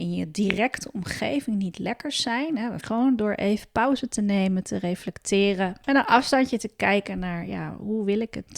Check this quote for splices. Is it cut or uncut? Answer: cut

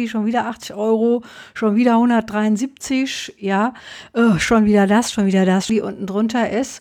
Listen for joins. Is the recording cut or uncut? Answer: cut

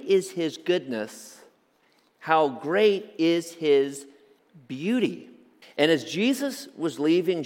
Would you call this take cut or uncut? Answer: cut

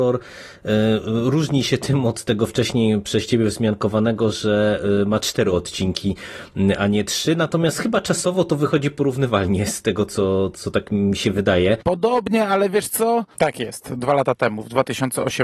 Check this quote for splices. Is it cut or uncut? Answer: cut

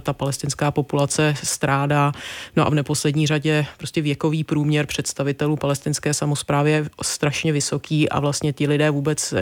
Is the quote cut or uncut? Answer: uncut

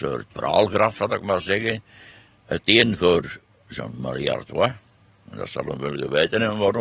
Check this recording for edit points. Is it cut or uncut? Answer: uncut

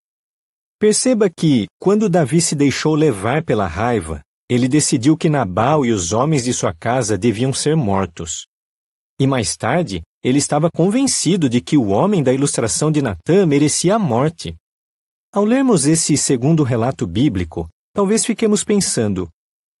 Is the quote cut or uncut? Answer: uncut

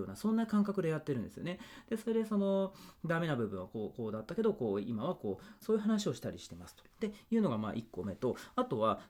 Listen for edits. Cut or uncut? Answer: cut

